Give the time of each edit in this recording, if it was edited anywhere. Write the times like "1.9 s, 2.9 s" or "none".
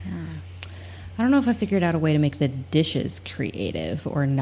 none